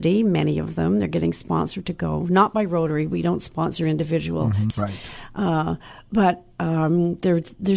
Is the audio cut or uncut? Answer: cut